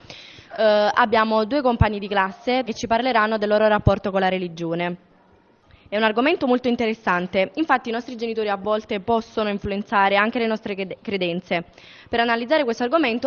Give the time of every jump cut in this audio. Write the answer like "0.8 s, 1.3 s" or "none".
2.6 s